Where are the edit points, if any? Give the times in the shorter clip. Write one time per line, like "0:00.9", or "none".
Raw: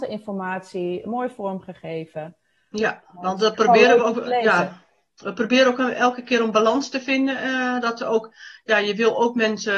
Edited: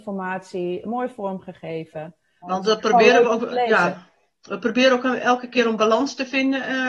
0:02.4